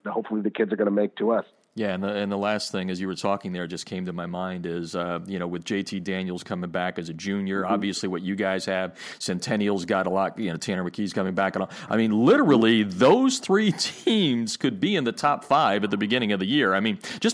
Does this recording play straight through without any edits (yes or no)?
yes